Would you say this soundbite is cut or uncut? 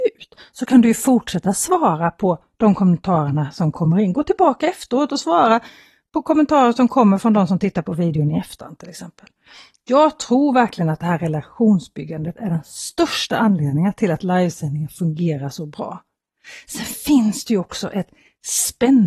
uncut